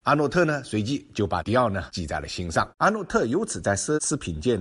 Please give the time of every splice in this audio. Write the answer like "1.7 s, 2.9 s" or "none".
2.7 s

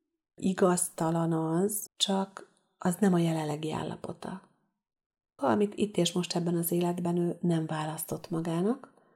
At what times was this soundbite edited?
1.9 s, 5.4 s

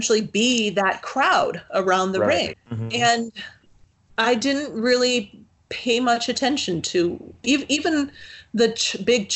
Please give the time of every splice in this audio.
2.5 s

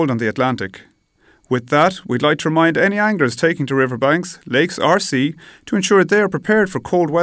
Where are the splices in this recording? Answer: none

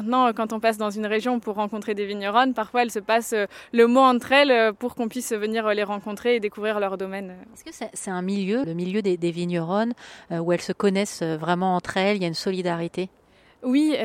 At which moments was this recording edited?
8.6 s

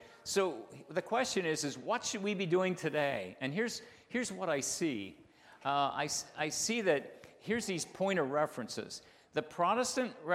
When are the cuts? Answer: none

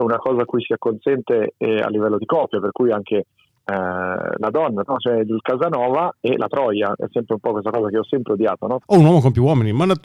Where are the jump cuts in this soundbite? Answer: 4.9 s, 8.8 s

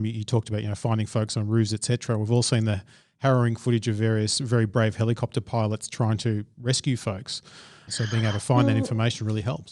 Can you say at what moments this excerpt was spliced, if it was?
7.9 s

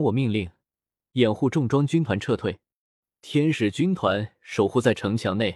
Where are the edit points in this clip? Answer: 1.1 s

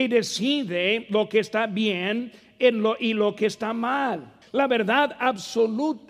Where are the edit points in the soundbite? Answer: 4.4 s

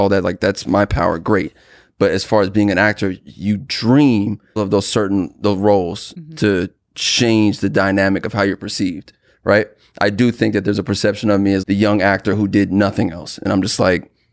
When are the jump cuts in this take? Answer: 4.6 s, 11.6 s

